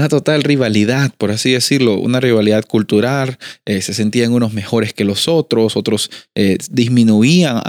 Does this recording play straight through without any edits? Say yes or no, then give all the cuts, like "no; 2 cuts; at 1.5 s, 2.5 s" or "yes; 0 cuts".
yes; 0 cuts